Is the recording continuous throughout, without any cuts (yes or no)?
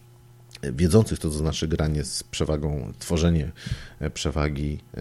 yes